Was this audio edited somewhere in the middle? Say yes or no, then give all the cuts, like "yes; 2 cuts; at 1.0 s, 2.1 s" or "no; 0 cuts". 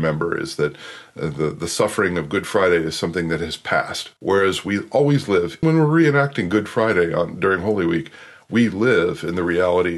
yes; 2 cuts; at 4.2 s, 5.6 s